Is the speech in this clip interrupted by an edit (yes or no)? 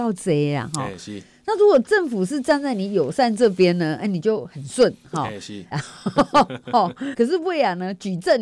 yes